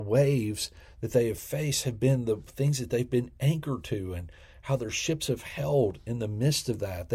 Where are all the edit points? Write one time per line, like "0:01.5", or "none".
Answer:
none